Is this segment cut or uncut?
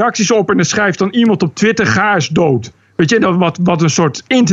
uncut